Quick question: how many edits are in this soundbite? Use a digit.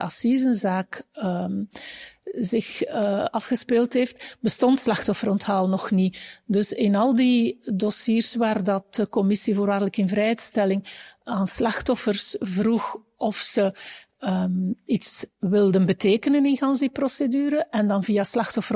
0